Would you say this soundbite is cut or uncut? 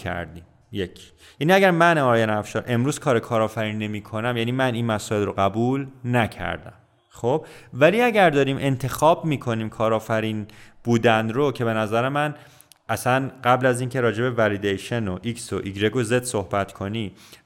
uncut